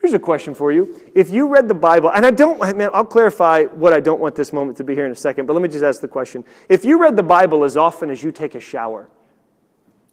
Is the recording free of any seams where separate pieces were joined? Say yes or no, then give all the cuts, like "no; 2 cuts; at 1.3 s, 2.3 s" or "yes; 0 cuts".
yes; 0 cuts